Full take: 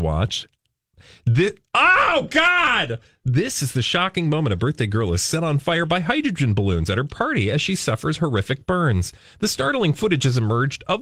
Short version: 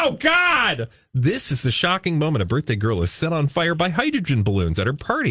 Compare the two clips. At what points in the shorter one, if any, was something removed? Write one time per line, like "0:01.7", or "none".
none